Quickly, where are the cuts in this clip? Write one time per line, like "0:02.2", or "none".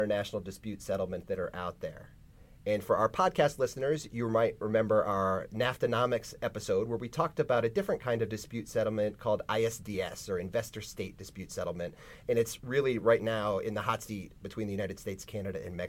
0:12.2